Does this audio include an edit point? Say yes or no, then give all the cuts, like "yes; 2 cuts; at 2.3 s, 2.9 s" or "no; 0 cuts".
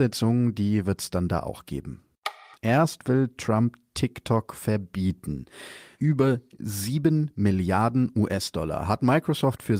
yes; 2 cuts; at 2.5 s, 5.9 s